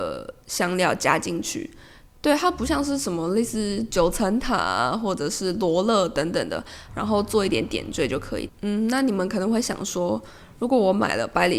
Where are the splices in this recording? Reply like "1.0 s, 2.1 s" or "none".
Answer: 6.9 s, 8.5 s

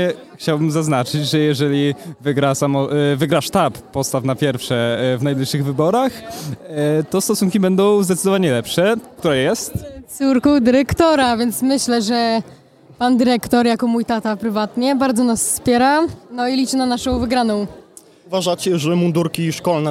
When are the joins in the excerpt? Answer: 9.2 s

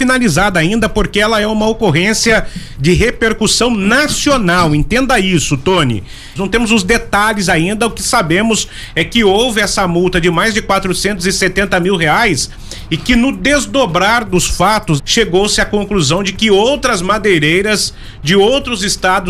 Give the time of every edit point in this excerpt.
6.4 s, 15.0 s

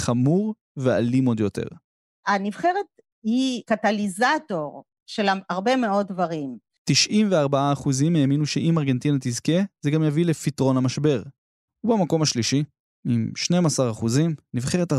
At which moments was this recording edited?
6.8 s, 11.7 s

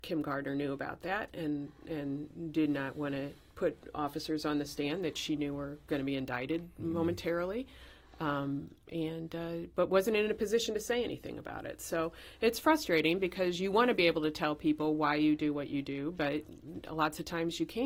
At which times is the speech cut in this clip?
none

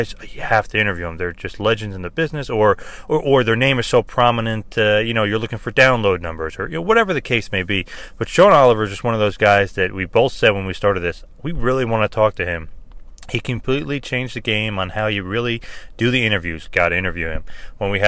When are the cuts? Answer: 16.6 s

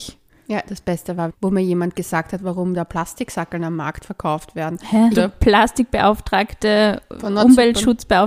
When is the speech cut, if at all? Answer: 1.3 s, 5.1 s

